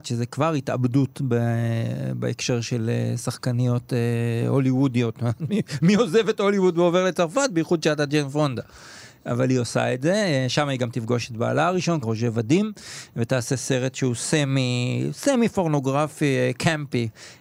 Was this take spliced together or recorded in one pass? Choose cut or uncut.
cut